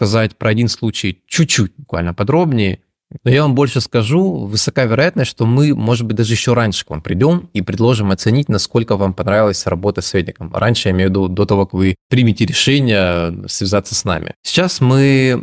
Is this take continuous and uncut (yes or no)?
no